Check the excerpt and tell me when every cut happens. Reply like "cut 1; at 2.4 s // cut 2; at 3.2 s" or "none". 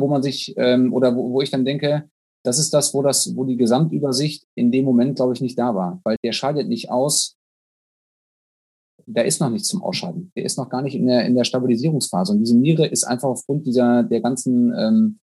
cut 1; at 6.2 s